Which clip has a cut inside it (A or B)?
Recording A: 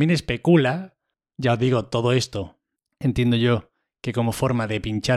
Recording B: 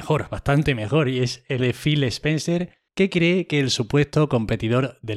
B